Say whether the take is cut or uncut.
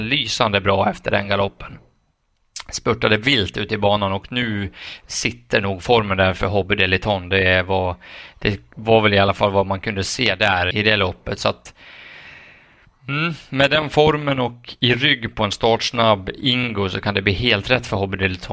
cut